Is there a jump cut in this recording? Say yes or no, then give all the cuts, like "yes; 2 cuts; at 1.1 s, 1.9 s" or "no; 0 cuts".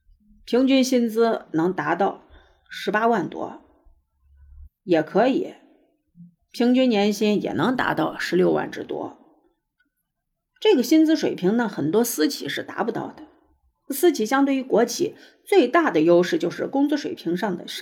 yes; 1 cut; at 4.6 s